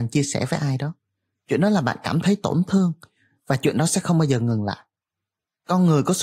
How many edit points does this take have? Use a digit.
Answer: 0